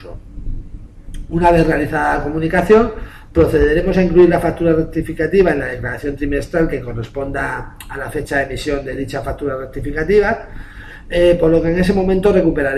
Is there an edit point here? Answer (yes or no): no